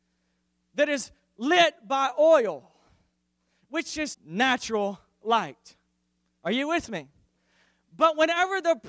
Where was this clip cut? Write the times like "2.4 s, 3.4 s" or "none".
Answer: 4.1 s